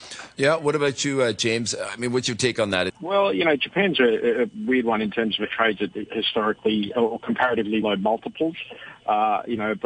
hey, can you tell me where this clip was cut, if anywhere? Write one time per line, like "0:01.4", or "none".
0:02.9
0:07.8